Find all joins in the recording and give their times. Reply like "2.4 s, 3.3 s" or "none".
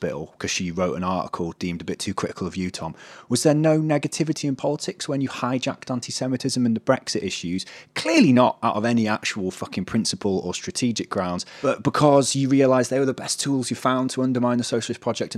none